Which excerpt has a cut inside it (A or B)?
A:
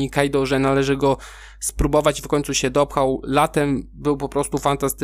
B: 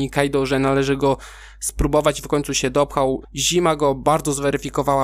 B